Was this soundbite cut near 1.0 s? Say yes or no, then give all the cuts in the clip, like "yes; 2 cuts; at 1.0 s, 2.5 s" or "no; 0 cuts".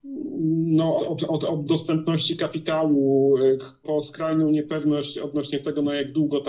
yes; 2 cuts; at 1.0 s, 3.8 s